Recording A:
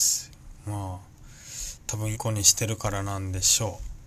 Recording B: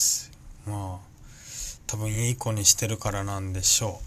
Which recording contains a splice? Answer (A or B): A